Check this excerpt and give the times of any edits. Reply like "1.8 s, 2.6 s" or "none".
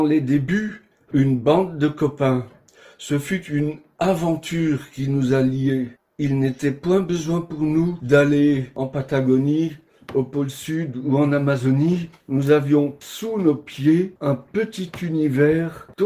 1.1 s, 12.2 s